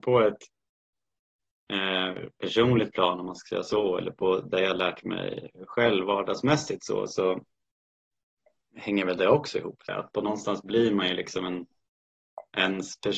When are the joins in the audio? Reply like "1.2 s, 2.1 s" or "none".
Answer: 9.9 s